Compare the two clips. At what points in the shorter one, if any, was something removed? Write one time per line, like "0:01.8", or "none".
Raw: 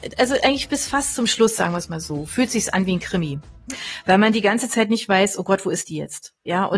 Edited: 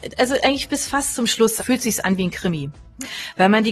0:01.6

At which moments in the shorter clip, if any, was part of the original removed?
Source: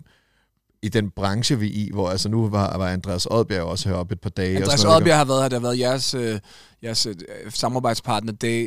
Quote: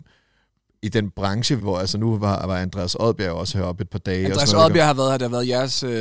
0:01.6

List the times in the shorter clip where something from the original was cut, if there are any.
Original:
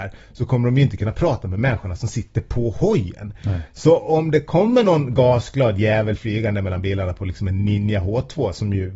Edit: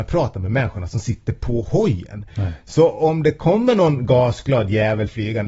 none

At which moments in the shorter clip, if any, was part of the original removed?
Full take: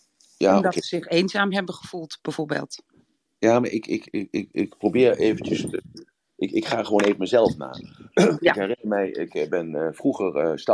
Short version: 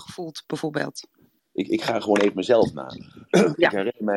0:01.4

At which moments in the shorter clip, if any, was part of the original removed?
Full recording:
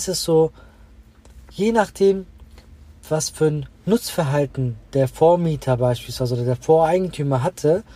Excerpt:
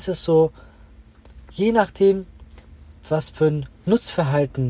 none

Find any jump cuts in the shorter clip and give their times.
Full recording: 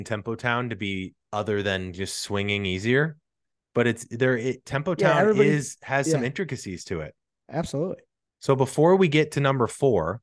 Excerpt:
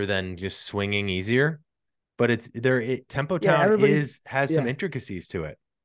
none

